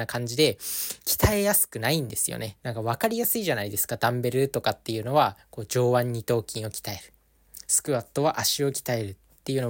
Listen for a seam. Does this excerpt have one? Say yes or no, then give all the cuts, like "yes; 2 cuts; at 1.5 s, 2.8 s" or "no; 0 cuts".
yes; 1 cut; at 2.6 s